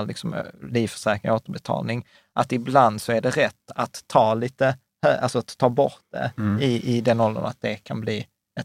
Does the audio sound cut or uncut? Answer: uncut